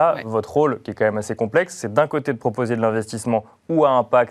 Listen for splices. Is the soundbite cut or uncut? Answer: uncut